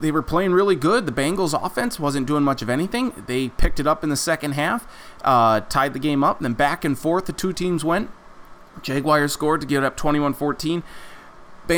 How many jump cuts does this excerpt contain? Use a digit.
0